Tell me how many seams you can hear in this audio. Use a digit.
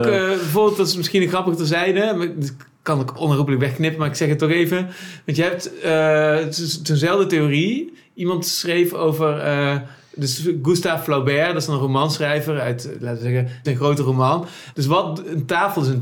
2